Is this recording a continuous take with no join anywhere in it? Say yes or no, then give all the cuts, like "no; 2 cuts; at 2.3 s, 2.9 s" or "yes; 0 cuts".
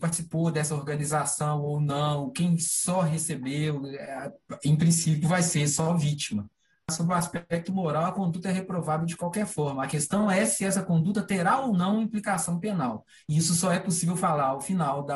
yes; 0 cuts